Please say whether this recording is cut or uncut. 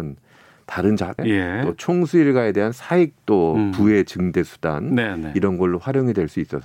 cut